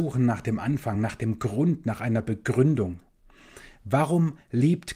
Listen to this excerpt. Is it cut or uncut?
uncut